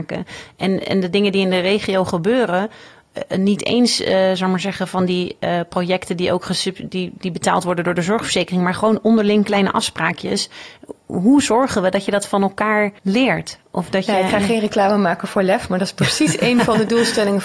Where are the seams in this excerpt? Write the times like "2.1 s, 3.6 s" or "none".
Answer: 13.0 s